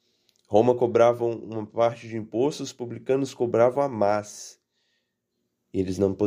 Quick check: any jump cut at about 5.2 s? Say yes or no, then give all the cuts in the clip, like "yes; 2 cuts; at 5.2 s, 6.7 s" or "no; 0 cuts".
no; 0 cuts